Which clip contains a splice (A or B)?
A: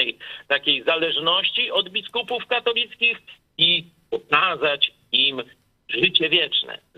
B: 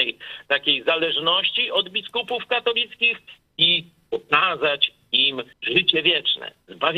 B